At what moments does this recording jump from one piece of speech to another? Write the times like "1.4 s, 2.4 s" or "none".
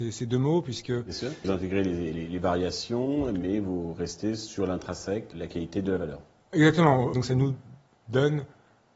1.4 s, 5.3 s, 7.1 s